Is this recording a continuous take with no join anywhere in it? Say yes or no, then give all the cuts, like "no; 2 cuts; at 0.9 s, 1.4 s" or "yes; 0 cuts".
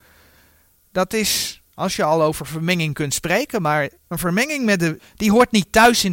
no; 3 cuts; at 1.7 s, 4.0 s, 5.0 s